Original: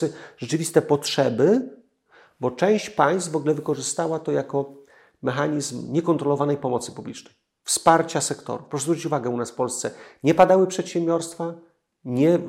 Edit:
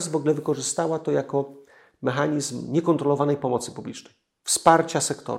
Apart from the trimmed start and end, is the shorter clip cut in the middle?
no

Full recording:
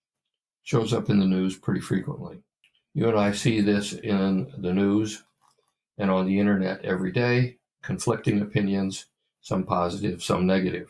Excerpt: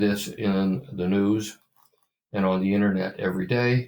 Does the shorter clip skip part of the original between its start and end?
no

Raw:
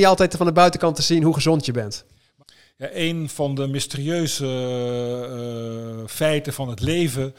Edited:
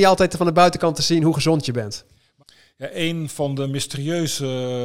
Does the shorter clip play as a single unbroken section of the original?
yes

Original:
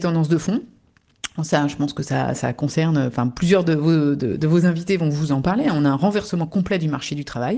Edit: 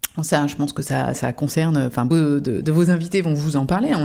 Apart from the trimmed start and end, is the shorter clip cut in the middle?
yes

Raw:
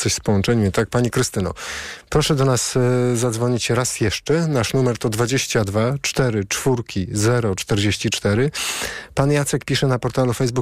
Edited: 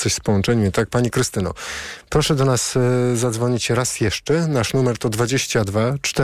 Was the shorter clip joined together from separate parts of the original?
no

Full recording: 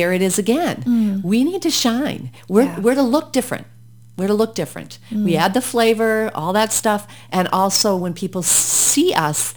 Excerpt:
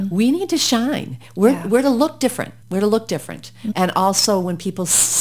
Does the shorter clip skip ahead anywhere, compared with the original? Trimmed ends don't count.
yes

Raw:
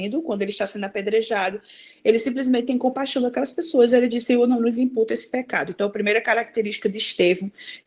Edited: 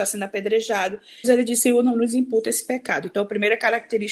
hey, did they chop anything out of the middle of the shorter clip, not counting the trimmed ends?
yes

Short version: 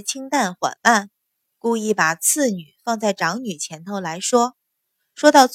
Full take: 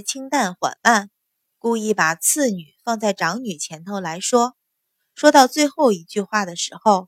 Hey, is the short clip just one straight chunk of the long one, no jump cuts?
yes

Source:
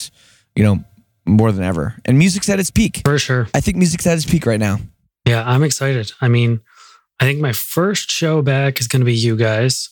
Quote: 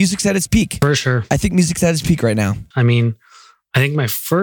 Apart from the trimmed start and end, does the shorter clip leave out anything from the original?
yes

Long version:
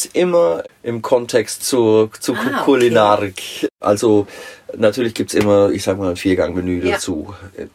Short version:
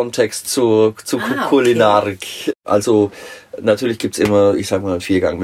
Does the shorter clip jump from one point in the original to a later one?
no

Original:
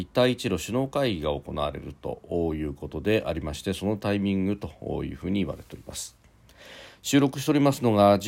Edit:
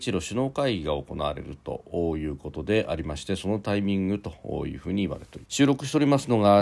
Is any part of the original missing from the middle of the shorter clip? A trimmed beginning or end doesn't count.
yes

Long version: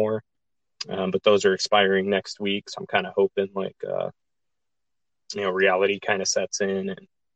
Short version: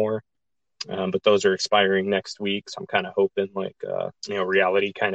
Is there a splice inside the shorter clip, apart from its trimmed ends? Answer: yes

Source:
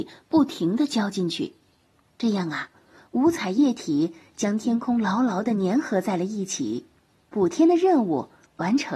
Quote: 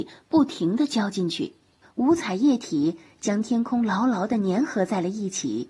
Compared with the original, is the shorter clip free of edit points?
no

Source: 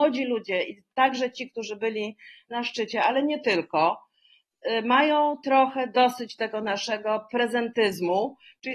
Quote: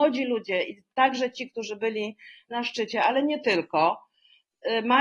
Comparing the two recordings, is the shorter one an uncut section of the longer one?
yes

